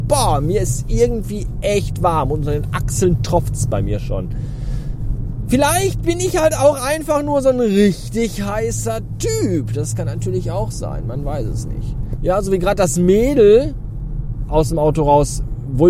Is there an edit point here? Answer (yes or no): yes